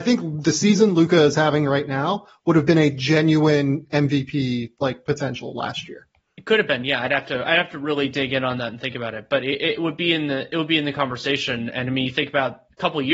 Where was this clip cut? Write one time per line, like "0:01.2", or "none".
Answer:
none